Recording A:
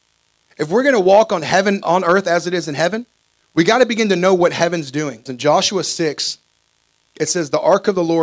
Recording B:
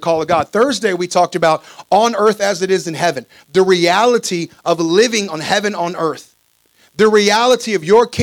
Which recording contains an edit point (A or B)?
A